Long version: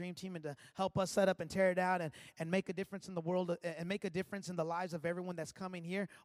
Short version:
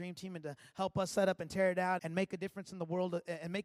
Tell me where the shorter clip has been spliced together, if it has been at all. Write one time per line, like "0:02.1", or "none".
0:02.0